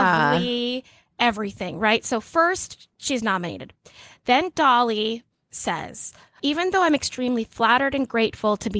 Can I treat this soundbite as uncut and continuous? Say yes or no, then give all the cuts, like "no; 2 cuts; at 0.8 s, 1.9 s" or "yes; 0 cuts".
no; 2 cuts; at 2.9 s, 6.4 s